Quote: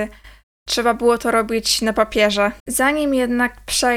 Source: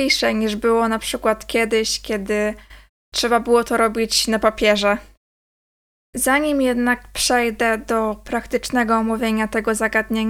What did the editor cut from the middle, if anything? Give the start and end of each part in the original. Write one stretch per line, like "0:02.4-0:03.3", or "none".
0:05.1-0:06.1